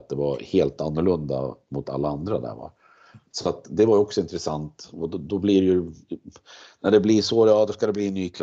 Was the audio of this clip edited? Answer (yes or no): no